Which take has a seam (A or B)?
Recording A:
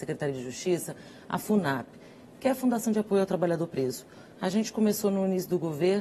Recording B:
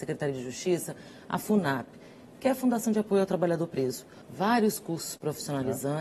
B